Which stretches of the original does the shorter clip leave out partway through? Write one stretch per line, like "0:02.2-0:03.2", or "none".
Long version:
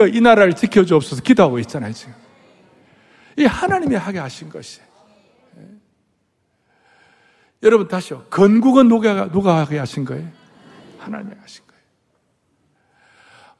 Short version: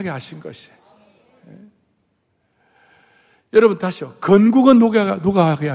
none